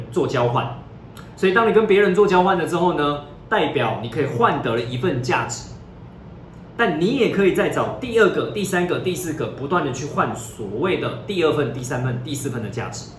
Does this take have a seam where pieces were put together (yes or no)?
no